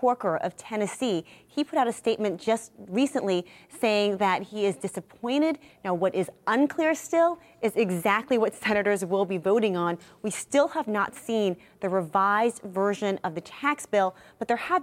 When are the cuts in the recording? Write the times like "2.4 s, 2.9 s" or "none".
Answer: 5.7 s